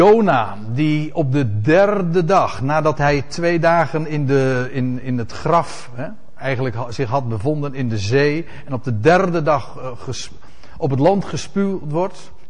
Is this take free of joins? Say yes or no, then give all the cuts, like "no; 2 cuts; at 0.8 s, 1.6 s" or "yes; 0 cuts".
yes; 0 cuts